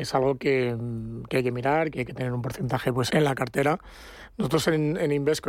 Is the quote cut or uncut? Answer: cut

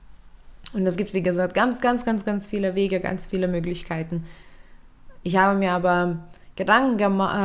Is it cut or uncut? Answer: uncut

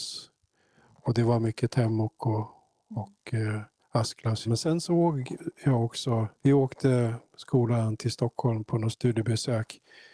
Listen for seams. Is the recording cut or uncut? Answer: cut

